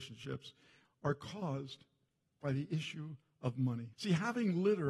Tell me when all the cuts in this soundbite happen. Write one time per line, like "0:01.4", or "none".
0:03.9